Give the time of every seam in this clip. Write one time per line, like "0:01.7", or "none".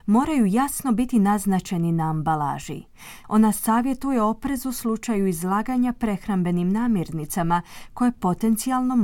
0:03.2